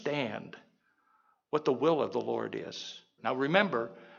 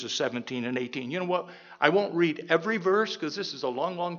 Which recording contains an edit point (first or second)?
first